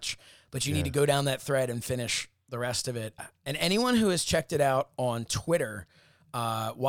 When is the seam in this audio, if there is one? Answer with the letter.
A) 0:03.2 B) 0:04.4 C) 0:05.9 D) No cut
A